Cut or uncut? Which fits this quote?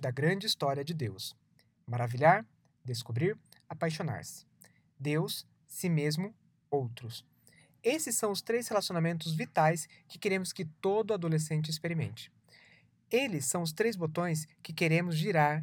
uncut